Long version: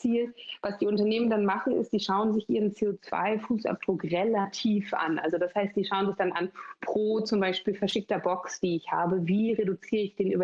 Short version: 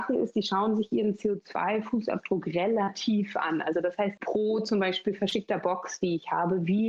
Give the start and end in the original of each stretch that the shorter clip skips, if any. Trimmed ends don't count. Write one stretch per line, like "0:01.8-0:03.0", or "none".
0:05.7-0:06.8